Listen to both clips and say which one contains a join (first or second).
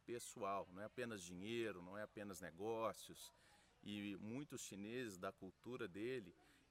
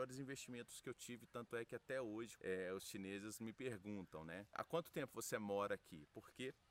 second